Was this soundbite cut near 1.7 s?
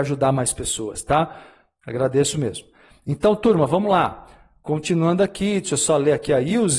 no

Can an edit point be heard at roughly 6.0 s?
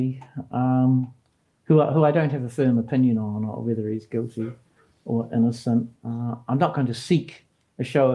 yes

